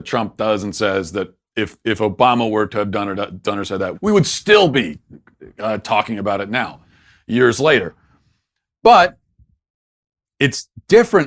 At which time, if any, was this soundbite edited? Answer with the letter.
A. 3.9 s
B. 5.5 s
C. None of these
A